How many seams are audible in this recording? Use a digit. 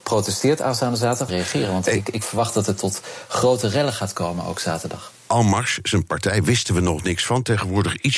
1